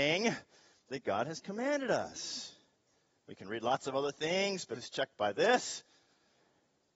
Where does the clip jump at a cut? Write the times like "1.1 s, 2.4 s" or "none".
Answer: 3.2 s, 4.7 s